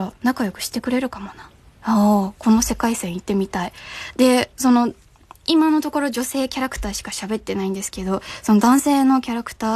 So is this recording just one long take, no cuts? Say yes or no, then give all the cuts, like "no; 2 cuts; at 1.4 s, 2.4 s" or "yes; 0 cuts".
yes; 0 cuts